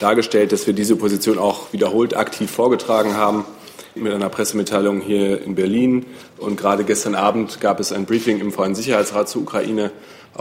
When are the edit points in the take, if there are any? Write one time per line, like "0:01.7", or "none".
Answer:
0:04.0